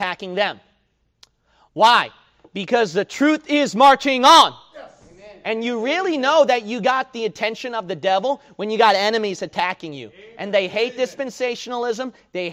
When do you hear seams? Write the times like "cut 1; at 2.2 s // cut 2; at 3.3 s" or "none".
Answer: cut 1; at 5.4 s

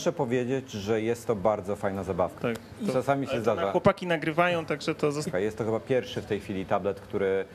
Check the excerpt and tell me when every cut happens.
cut 1; at 2.4 s // cut 2; at 5.3 s

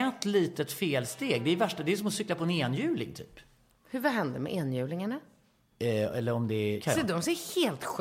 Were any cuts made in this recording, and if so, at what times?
cut 1; at 5.7 s // cut 2; at 6.8 s

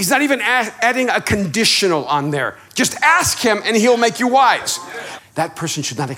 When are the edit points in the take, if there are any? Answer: cut 1; at 5.2 s

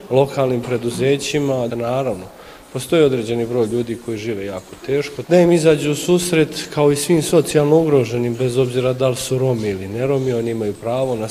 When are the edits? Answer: cut 1; at 1.7 s // cut 2; at 5.2 s

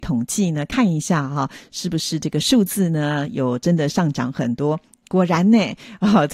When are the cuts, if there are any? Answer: none

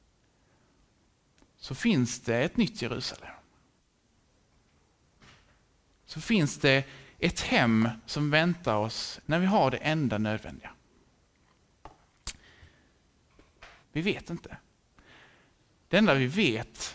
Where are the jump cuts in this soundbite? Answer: cut 1; at 9.2 s // cut 2; at 13.8 s

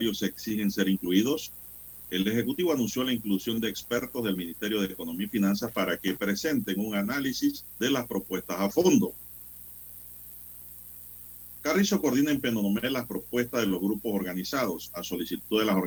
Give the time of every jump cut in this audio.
cut 1; at 7.7 s

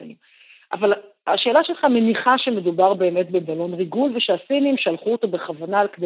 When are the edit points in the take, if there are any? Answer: none

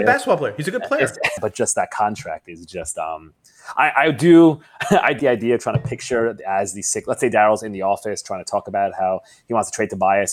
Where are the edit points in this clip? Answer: cut 1; at 1.4 s // cut 2; at 5.2 s

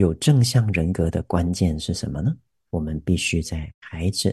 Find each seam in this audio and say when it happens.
cut 1; at 2.7 s

